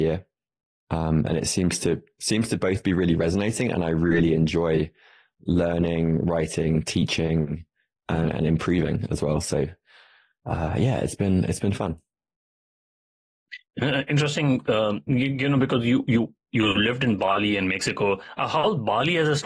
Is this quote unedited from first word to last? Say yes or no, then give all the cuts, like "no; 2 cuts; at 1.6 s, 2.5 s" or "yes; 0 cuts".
yes; 0 cuts